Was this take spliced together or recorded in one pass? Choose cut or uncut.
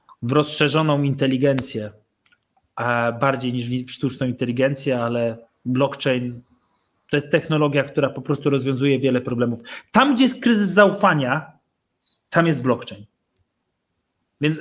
uncut